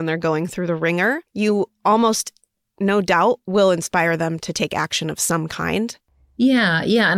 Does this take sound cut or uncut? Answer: cut